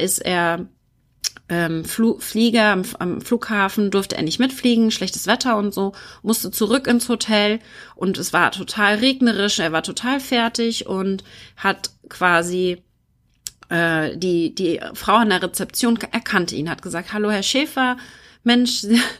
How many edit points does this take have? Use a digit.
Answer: 0